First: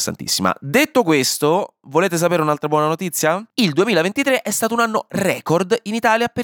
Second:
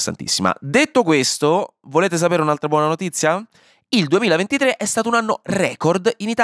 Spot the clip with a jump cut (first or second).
first